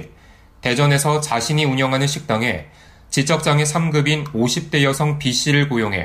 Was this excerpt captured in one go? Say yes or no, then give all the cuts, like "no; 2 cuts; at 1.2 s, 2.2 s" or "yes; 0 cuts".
yes; 0 cuts